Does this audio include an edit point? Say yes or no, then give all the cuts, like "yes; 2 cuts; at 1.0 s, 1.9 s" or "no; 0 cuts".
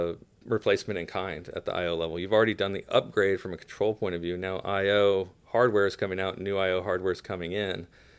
no; 0 cuts